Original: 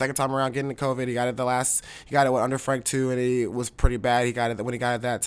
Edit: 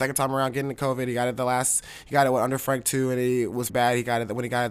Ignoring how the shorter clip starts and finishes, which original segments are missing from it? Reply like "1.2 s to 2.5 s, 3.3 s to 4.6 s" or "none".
3.7 s to 4.0 s